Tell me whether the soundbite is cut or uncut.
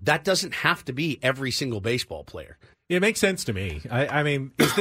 cut